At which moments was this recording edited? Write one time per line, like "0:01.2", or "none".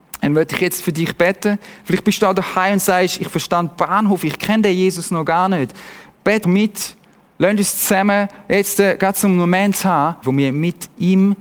0:06.4
0:10.2

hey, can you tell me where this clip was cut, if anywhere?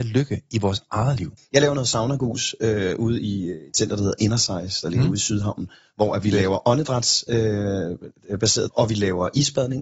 0:01.4
0:08.7

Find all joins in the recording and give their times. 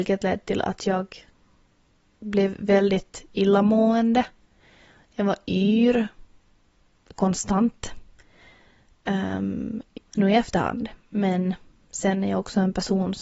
0:10.0

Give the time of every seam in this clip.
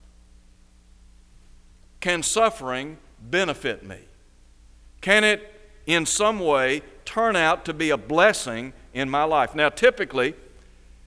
none

